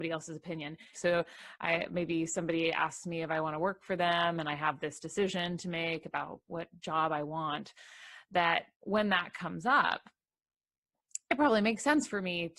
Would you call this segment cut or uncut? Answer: cut